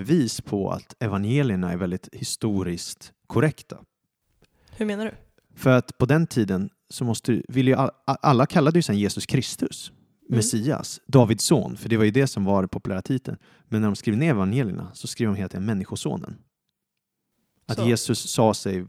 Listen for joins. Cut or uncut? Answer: uncut